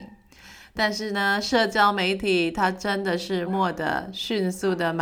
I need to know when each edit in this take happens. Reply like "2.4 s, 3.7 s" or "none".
3.5 s